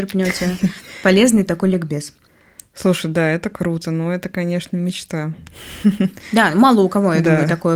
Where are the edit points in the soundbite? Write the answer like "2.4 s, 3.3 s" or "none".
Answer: none